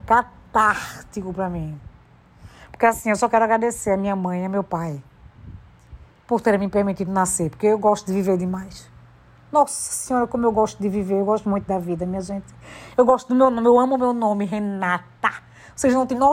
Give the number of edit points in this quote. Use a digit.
0